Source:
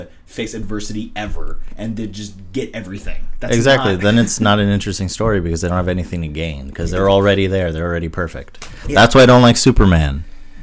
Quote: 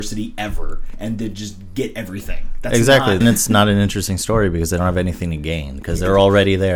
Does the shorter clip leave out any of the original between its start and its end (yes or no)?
yes